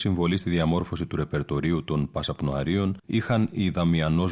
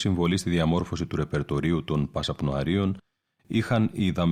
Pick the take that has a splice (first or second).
first